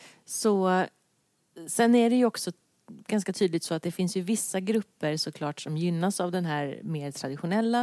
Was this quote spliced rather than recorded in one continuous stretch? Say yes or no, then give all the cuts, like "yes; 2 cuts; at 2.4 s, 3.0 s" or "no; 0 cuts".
no; 0 cuts